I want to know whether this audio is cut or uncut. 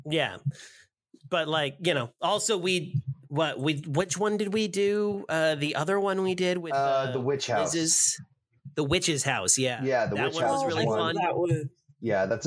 uncut